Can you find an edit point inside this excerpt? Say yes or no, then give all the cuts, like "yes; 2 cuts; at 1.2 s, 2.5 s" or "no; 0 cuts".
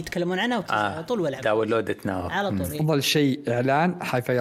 no; 0 cuts